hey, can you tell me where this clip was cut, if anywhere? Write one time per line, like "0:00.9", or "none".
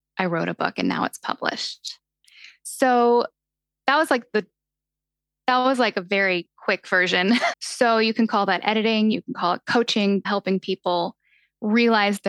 0:07.5
0:09.1
0:10.2